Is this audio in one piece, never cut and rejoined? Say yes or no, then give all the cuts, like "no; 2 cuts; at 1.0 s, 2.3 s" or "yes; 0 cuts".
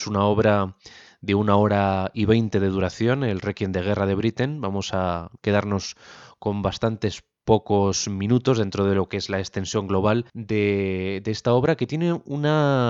no; 2 cuts; at 5.4 s, 10.3 s